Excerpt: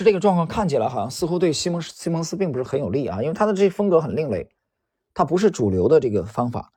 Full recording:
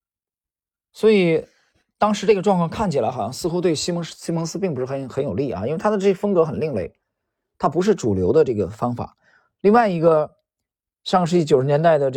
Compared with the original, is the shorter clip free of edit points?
no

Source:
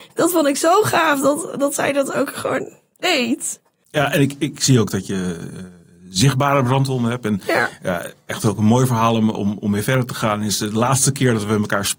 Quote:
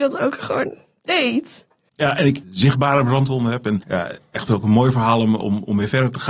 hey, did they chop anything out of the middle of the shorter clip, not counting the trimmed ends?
yes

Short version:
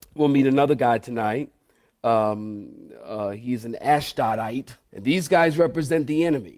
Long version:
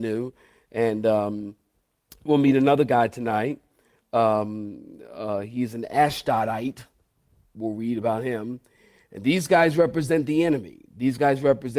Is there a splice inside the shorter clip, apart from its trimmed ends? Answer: yes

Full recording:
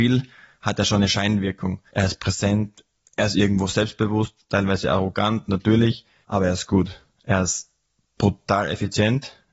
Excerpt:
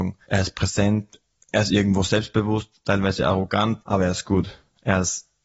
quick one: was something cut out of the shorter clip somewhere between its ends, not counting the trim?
yes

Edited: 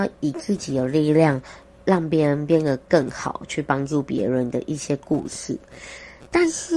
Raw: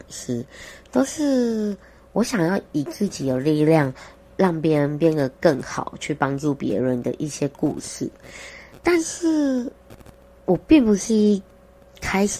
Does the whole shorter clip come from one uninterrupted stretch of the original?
yes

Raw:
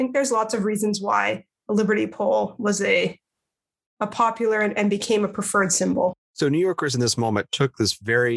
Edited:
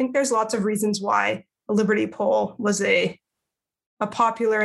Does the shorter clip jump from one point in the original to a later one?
no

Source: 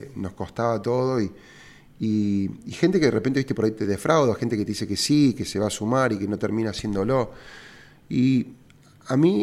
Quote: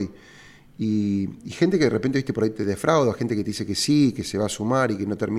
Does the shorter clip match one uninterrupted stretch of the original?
yes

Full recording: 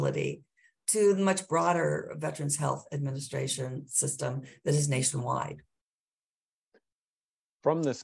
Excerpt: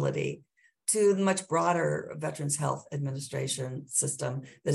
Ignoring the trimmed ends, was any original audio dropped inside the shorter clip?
no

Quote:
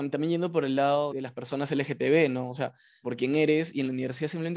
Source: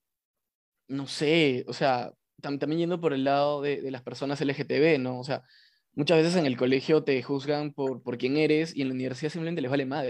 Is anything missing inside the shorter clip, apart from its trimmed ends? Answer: yes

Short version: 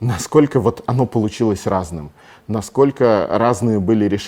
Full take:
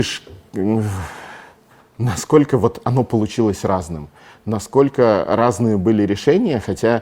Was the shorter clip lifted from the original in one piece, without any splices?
yes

